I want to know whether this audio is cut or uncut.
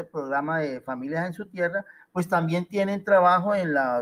uncut